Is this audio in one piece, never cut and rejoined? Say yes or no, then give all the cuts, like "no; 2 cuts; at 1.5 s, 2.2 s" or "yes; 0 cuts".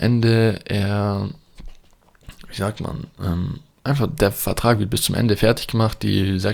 yes; 0 cuts